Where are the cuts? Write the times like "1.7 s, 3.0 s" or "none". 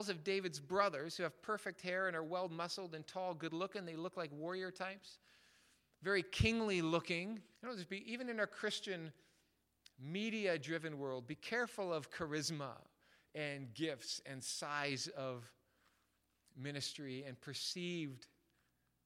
7.6 s